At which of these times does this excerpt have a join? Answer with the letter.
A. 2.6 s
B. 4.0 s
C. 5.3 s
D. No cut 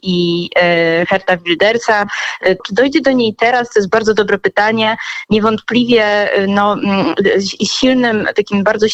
A